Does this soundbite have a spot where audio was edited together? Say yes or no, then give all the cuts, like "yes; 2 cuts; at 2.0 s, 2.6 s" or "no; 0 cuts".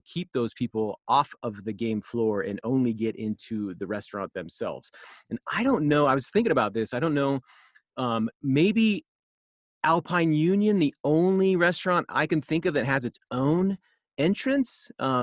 no; 0 cuts